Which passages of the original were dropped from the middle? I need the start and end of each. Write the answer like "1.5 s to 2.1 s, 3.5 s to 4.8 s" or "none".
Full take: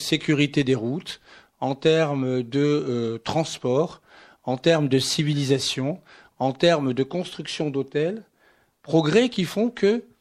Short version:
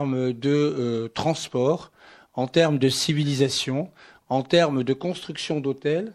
none